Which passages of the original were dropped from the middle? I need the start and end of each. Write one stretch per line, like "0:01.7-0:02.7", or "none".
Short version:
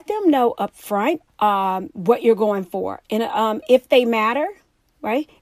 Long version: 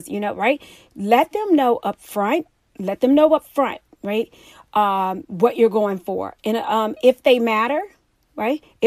0:02.5-0:04.6